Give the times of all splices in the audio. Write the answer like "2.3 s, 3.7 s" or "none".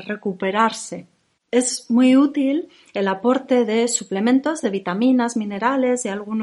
none

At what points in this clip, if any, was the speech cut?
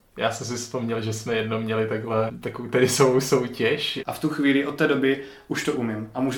2.3 s, 4.0 s

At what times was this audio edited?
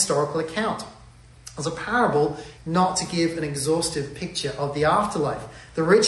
2.6 s

